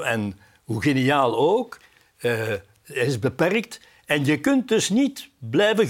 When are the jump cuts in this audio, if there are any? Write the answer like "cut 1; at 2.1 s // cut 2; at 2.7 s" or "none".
none